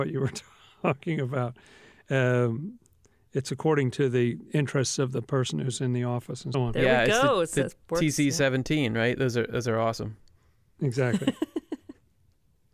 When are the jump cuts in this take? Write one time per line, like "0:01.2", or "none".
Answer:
0:06.5